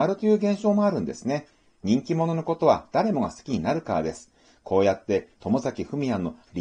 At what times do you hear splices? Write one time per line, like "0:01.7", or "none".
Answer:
none

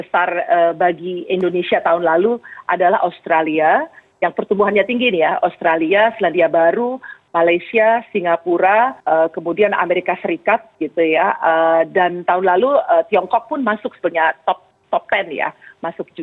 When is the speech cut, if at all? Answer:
0:09.0

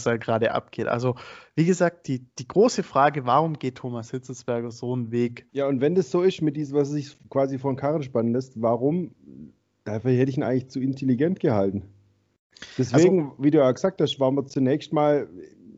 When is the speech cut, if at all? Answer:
0:05.5

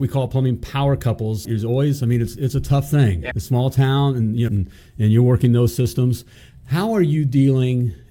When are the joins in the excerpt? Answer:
0:01.4
0:03.3
0:04.5

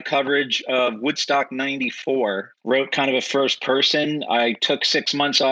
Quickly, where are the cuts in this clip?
0:02.5

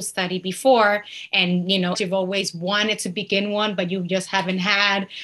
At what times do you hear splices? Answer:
0:01.9

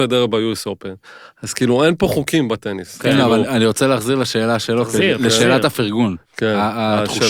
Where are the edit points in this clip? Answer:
none

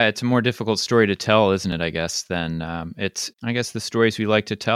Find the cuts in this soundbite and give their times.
0:03.3

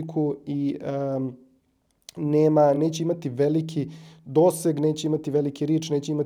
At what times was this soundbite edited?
none

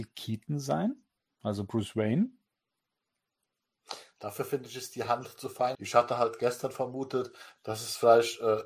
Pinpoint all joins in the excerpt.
0:05.7

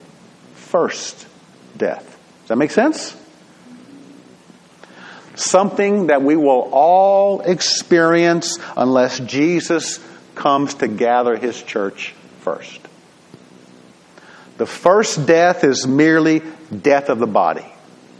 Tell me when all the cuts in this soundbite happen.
0:05.2

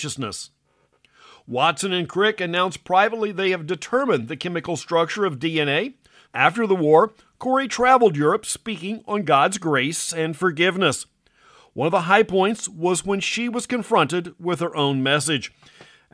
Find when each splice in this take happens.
0:06.3

